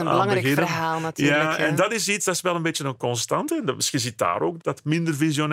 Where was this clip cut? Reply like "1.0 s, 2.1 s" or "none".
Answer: none